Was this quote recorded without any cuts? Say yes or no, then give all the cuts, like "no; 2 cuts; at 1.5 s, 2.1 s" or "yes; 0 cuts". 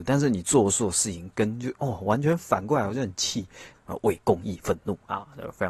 no; 1 cut; at 3.7 s